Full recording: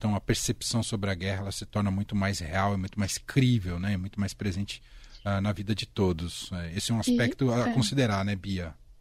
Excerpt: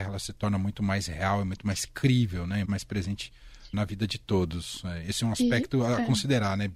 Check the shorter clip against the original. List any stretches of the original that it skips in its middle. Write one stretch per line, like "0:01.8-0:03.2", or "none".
0:04.0-0:04.1
0:05.2-0:05.4